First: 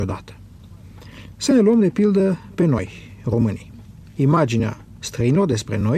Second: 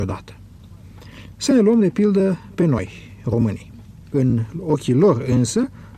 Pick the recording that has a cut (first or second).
second